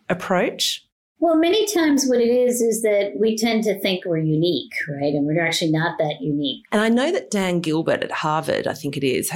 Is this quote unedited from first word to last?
no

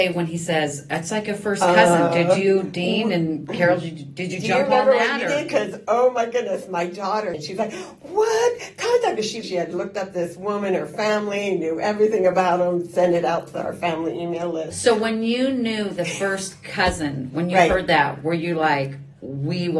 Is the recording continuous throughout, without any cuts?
no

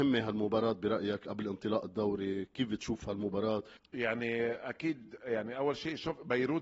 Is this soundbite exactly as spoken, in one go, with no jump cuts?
no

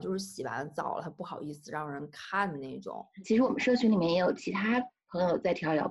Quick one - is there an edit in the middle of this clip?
yes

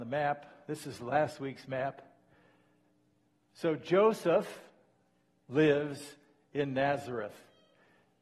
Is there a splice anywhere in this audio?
no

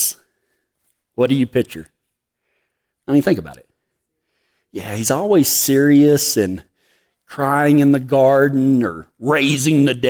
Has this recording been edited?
no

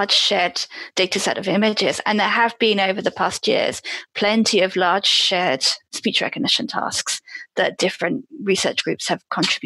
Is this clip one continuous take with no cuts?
yes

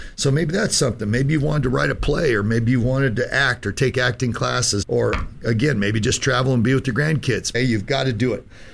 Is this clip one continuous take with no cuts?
no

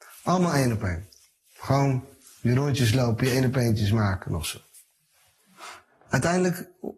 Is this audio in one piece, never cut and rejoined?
yes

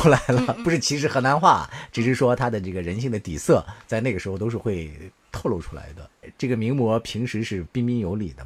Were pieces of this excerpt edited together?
yes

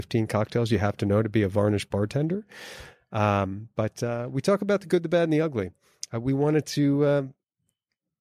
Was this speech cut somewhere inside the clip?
no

